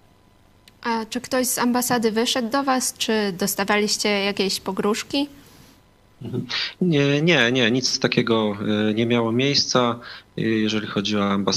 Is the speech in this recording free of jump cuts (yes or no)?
yes